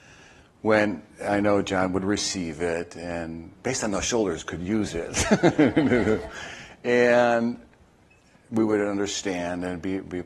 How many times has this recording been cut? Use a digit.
0